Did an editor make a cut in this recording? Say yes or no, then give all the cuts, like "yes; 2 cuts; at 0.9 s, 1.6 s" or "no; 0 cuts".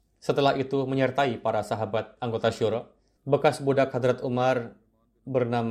yes; 1 cut; at 3.2 s